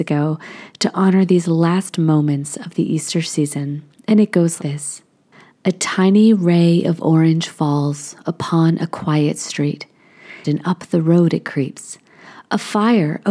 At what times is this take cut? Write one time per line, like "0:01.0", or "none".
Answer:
0:04.6
0:10.4